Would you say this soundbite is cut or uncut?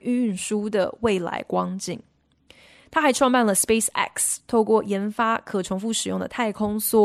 uncut